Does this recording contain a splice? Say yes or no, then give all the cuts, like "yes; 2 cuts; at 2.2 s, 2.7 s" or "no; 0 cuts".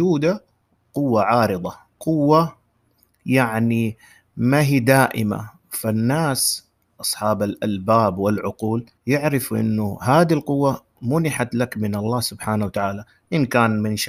yes; 1 cut; at 9.0 s